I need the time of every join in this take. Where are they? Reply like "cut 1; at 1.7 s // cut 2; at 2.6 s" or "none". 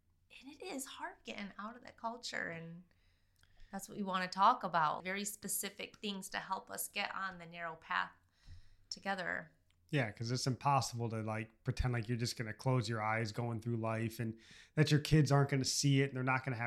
cut 1; at 5.0 s